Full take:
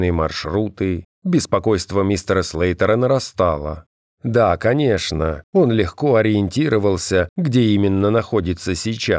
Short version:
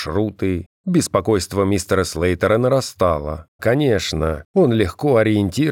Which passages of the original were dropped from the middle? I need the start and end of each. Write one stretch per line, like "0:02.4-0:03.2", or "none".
0:04.0-0:04.6